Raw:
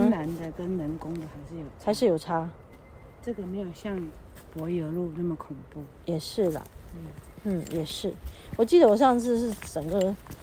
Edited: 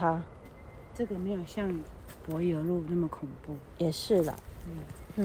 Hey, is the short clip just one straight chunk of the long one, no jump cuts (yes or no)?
yes